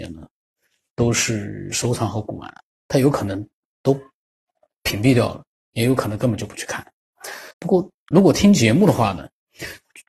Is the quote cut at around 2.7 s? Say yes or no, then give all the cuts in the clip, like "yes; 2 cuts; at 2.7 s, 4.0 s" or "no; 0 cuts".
no; 1 cut; at 7.5 s